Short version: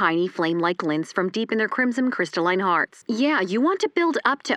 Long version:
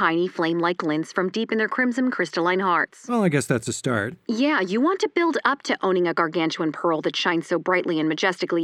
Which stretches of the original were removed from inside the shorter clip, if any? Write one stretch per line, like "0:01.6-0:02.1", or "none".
0:03.0-0:04.2